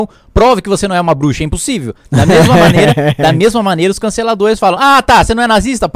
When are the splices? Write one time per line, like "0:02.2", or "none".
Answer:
none

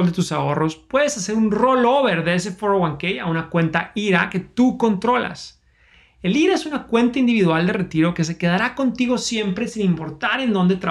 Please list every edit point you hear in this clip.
none

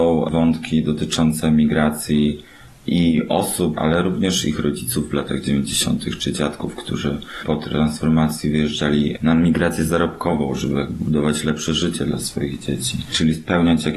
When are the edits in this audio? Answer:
0:03.8

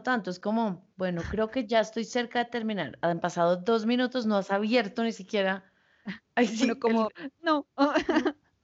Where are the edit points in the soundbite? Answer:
0:00.9

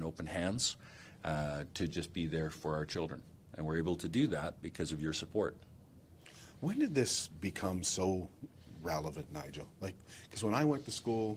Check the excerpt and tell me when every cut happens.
none

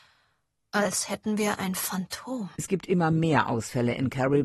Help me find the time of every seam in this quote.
0:02.5

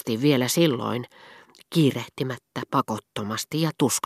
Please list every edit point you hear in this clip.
0:01.6

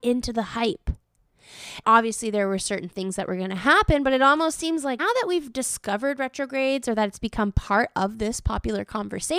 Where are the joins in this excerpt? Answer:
0:01.8
0:05.0

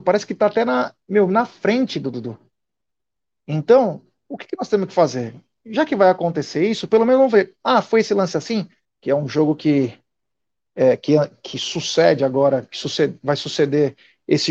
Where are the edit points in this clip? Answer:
0:08.8

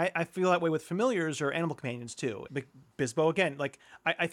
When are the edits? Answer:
0:02.5

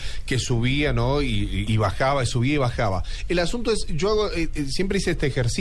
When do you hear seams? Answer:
0:01.7

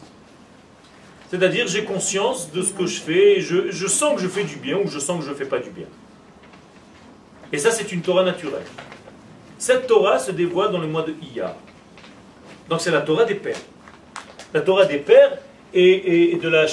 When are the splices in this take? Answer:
0:07.5

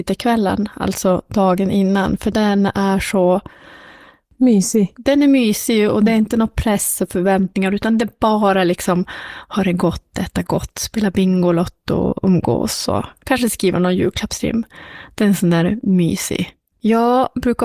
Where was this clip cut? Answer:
0:16.7

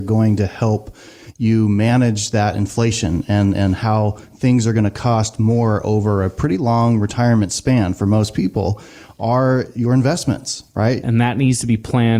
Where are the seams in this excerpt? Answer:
0:11.0

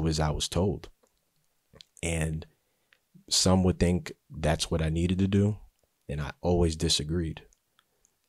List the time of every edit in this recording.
none

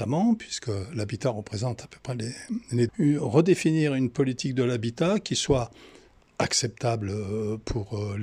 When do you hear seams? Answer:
0:02.9

